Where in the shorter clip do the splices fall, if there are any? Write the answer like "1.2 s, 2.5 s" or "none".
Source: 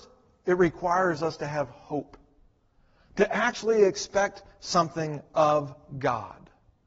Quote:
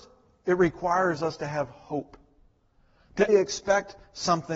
3.3 s